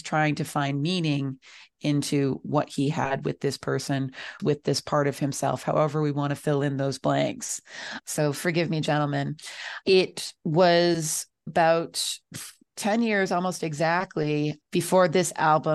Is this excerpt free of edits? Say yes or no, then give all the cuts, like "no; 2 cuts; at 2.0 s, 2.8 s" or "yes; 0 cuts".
no; 2 cuts; at 4.4 s, 8.0 s